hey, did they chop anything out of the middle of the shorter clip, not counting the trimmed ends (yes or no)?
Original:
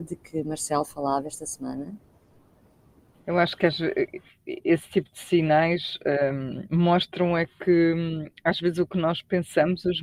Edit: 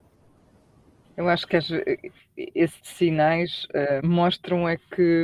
yes